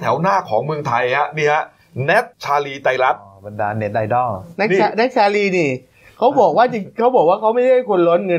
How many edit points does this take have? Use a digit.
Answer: 1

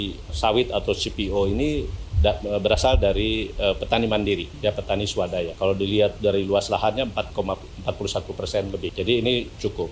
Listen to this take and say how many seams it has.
0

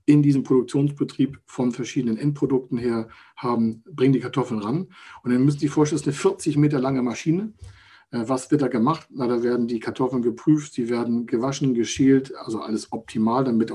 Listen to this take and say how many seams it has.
0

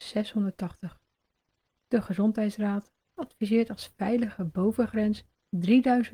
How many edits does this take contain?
1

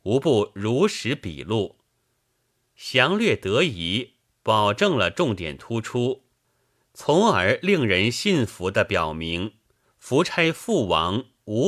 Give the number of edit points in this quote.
1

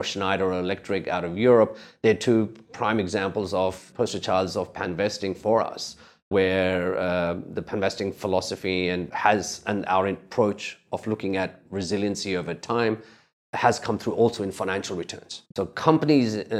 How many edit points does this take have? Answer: 1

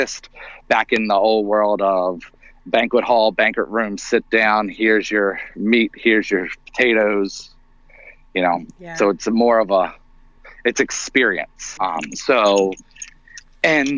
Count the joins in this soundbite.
1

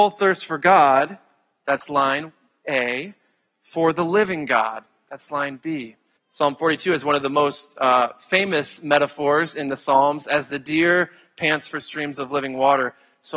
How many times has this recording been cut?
1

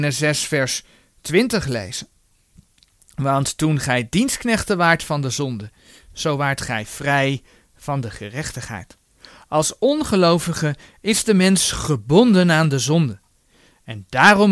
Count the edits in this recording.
0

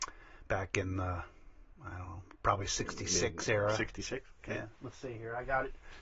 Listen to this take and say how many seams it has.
0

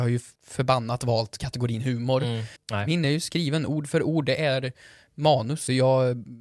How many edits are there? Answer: 1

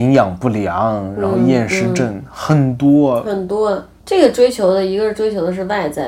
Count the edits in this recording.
0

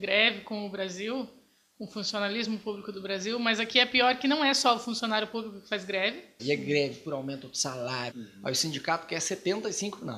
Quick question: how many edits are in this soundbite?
2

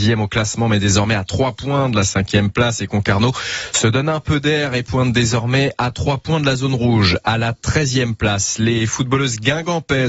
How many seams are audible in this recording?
0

